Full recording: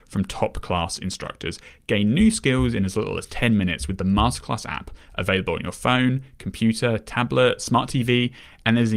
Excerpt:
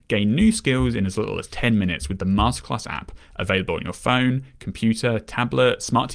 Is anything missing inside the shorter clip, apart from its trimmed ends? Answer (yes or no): no